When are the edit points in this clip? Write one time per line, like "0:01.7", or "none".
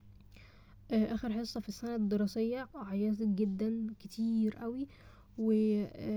0:02.7

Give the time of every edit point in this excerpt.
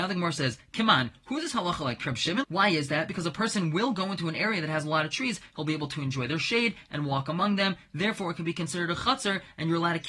0:02.4

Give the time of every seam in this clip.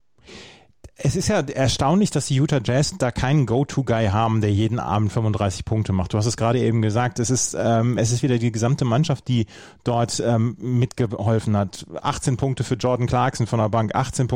none

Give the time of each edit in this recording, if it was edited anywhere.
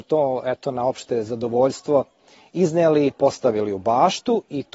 none

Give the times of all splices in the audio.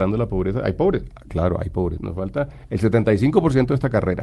0:02.0

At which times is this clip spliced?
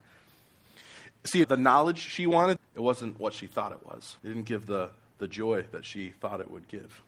0:01.4
0:02.6
0:04.2

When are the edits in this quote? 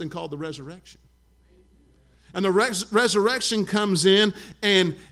none

